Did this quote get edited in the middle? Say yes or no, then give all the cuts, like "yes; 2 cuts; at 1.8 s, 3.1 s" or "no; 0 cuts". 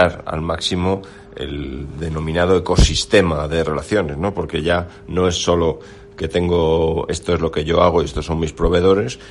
no; 0 cuts